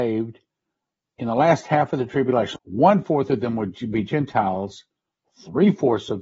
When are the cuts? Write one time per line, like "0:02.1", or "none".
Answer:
0:02.6